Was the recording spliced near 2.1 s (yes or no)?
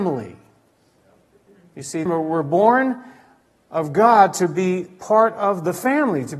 yes